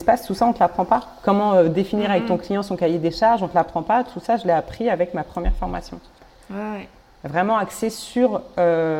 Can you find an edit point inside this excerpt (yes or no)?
no